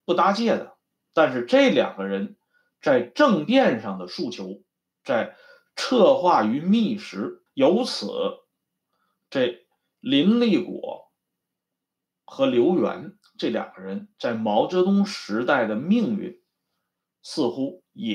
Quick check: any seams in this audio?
yes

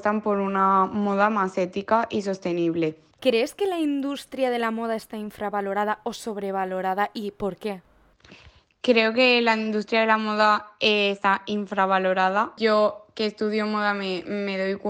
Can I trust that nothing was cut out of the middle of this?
no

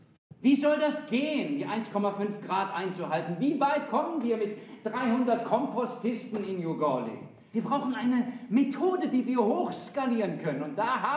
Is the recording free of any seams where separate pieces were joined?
no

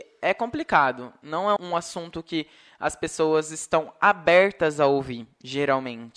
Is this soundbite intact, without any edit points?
no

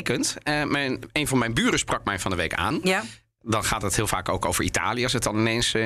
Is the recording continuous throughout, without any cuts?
yes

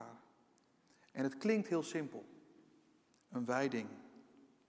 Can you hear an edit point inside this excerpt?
yes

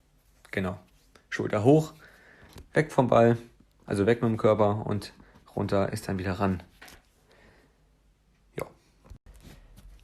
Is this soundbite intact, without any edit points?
yes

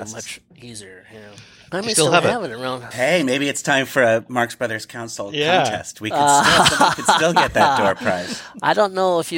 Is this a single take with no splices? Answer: no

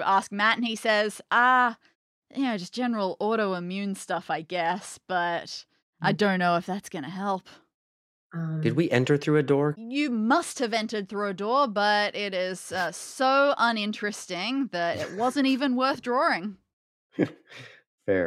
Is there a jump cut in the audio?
yes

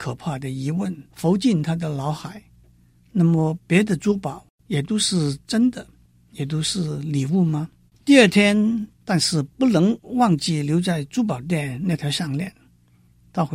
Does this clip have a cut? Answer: yes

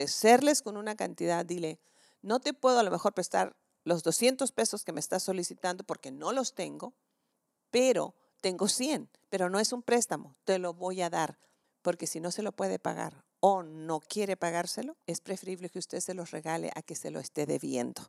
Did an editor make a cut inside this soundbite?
yes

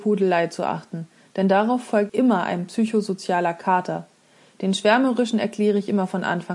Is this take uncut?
no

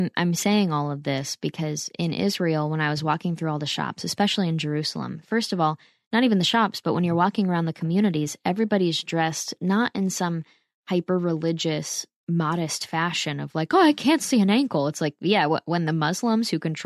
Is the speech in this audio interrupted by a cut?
no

